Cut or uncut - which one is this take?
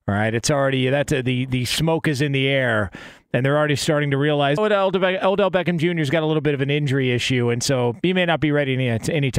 cut